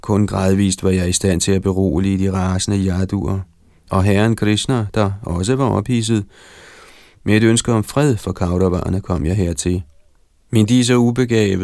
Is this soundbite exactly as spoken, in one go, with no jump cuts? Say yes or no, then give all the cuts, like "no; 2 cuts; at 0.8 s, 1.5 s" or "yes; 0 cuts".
yes; 0 cuts